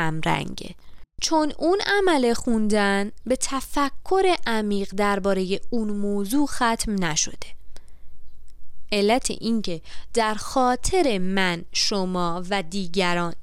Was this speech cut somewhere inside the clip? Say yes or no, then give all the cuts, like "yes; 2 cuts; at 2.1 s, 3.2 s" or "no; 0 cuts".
yes; 1 cut; at 1.1 s